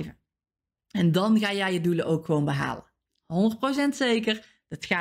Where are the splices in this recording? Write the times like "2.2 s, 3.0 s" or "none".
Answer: none